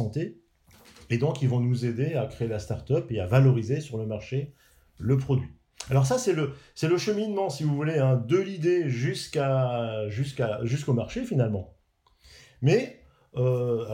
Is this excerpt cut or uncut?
uncut